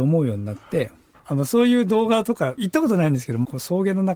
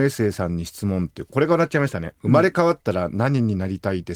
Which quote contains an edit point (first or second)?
first